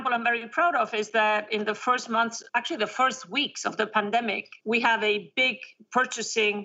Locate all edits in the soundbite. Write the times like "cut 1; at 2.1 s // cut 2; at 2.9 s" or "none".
cut 1; at 2.5 s // cut 2; at 4.6 s

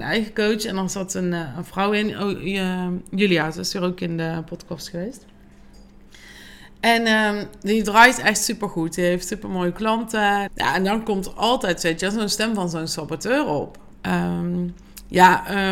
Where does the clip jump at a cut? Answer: cut 1; at 10.5 s // cut 2; at 13.9 s

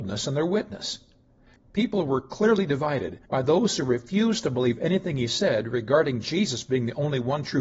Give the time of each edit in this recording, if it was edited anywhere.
cut 1; at 1.6 s // cut 2; at 3.3 s

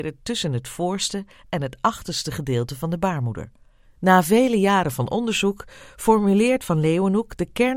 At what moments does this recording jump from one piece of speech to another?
cut 1; at 3.8 s

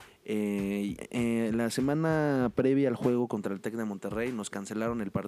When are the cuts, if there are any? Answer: cut 1; at 1.0 s

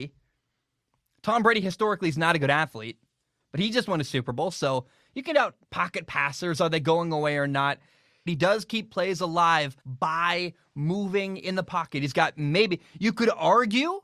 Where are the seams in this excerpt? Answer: cut 1; at 5.6 s // cut 2; at 8.3 s // cut 3; at 9.8 s

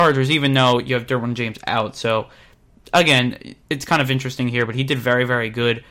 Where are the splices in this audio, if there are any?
none

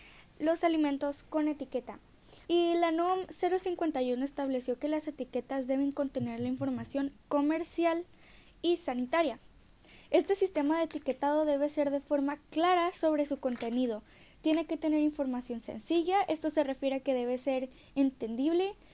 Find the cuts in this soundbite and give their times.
cut 1; at 2.4 s

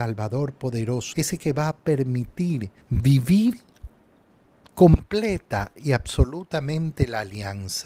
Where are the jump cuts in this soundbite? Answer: cut 1; at 1.1 s // cut 2; at 2.8 s

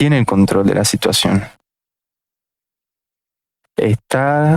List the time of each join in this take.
cut 1; at 3.6 s

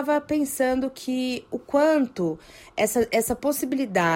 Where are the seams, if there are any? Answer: none

